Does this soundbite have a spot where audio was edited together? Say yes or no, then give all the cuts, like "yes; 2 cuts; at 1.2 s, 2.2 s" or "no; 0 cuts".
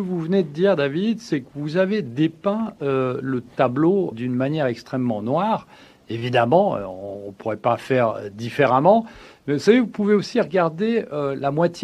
yes; 1 cut; at 4.1 s